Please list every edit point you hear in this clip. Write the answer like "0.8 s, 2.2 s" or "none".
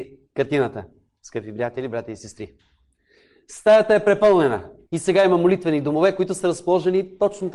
4.9 s